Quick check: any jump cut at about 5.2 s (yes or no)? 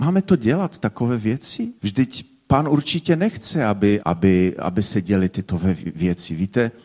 no